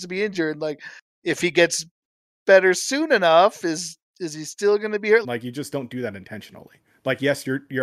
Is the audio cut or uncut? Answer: cut